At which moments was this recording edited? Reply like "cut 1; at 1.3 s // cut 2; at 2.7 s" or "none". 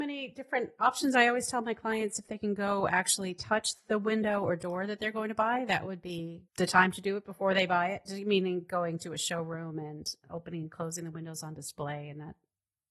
cut 1; at 6.5 s

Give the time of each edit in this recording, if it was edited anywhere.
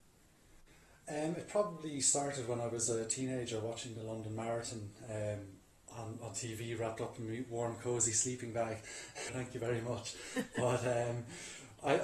cut 1; at 9.3 s

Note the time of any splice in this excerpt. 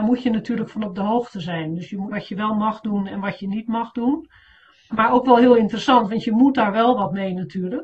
cut 1; at 2.1 s // cut 2; at 4.9 s

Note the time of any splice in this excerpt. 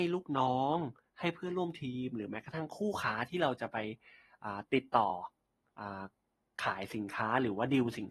none

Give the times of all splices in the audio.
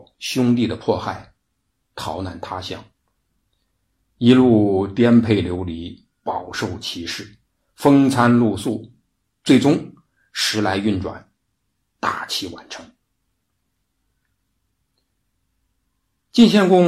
none

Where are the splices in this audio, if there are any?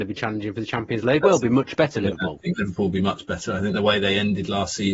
cut 1; at 1.2 s

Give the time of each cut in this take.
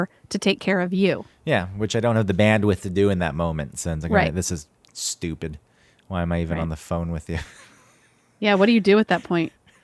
none

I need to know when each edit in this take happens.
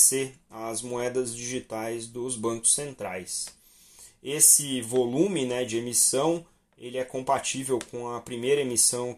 none

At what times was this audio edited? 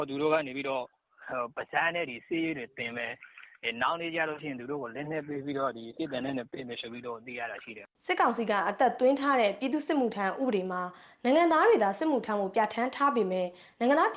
cut 1; at 8.0 s

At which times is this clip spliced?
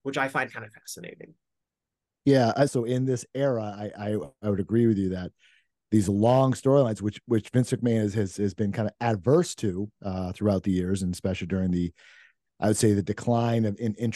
cut 1; at 2.7 s

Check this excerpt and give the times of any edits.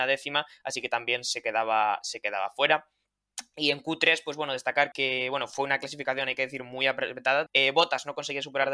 cut 1; at 4.9 s // cut 2; at 7.5 s

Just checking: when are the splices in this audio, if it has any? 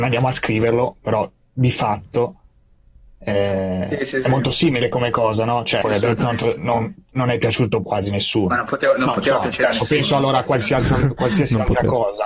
cut 1; at 5.8 s // cut 2; at 7.8 s

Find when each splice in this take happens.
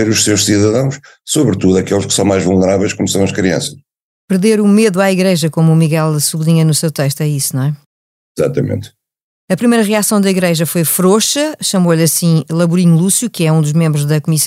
none

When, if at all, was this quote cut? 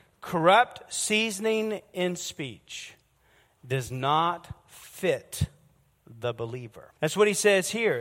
cut 1; at 7.0 s

